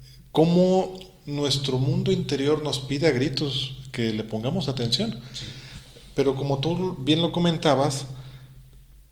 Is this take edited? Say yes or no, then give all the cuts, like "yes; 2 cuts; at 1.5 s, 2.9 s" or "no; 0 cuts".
no; 0 cuts